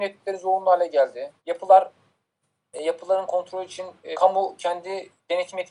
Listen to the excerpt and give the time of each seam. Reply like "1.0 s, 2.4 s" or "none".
1.4 s, 4.1 s